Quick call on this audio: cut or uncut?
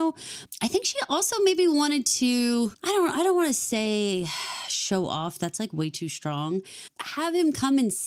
uncut